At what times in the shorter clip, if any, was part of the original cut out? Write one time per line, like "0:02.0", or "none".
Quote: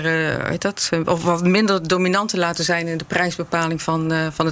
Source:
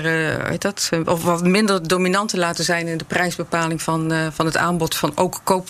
none